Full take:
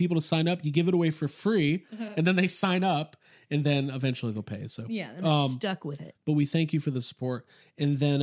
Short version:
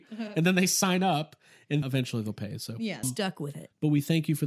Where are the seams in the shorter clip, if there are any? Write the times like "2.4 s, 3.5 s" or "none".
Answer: 1.8 s, 3.0 s